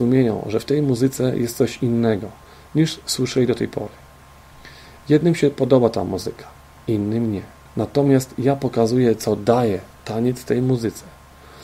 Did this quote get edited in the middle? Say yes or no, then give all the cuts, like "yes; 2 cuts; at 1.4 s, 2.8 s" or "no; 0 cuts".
yes; 2 cuts; at 7.7 s, 9.9 s